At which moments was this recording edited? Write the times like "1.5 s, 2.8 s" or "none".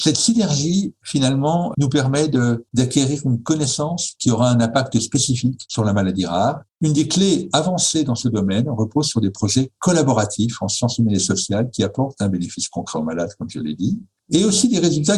1.7 s, 6.7 s